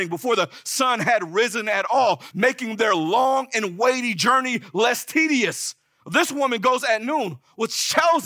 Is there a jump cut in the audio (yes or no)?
yes